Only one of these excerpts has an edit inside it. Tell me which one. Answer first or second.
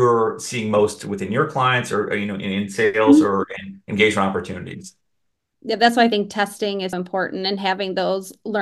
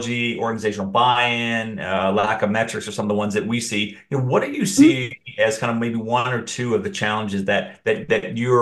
first